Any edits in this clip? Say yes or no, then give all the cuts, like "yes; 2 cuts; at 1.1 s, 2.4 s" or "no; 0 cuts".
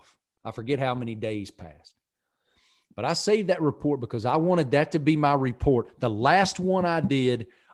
no; 0 cuts